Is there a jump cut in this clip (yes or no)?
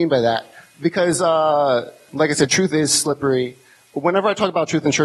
no